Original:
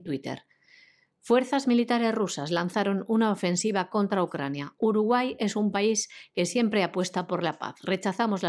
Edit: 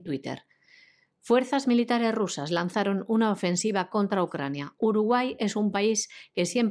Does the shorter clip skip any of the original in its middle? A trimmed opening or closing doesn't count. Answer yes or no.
no